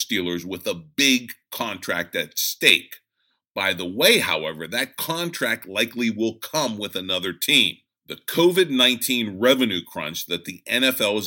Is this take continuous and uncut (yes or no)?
yes